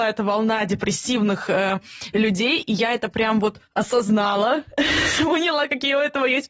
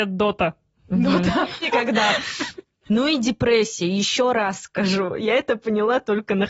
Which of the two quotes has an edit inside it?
second; 2 cuts; at 1.6 s, 2.8 s

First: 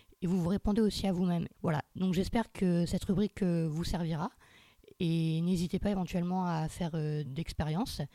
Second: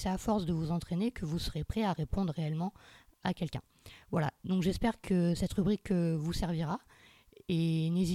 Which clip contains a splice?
first; 2 cuts; at 1.5 s, 7.2 s

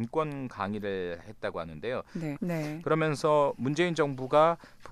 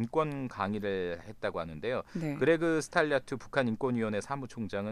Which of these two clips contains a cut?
first; 1 cut; at 2.4 s

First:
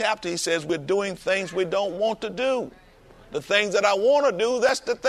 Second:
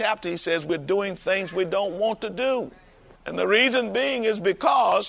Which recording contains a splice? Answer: second; 1 cut; at 3.1 s

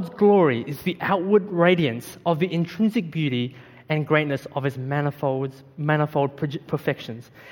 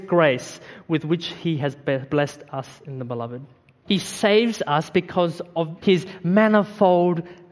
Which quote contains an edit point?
second; 2 cuts; at 3.8 s, 5.8 s

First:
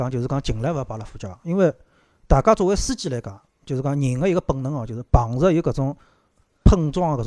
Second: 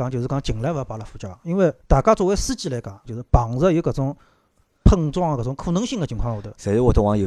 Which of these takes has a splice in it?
second; 2 cuts; at 1.8 s, 3.1 s

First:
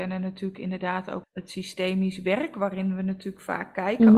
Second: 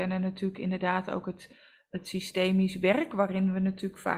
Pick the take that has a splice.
first; 1 cut; at 1.2 s

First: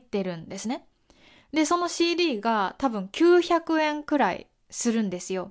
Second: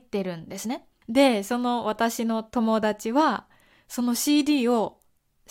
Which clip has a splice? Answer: second; 1 cut; at 1.0 s

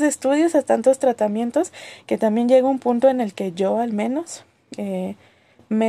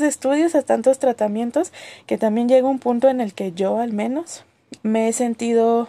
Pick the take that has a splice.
second; 1 cut; at 4.8 s

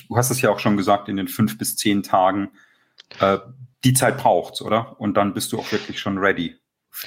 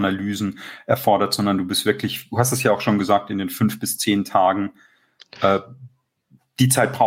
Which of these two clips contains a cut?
first; 1 cut; at 3.7 s

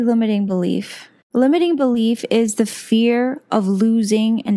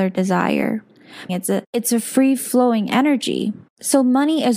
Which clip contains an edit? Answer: second; 1 cut; at 1.3 s

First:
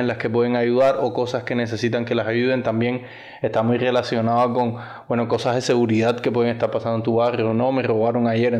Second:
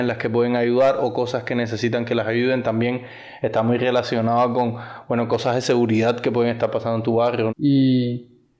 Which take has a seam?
second; 1 cut; at 7.5 s

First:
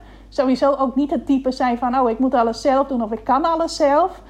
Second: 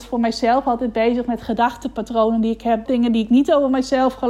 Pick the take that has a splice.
second; 1 cut; at 2.9 s

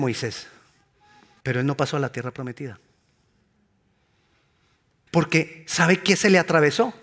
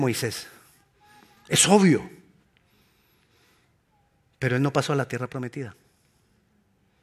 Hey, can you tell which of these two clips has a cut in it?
first; 2 cuts; at 1.4 s, 5.1 s

